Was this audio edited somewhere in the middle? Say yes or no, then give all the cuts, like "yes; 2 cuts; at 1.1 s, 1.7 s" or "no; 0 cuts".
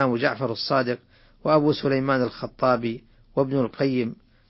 no; 0 cuts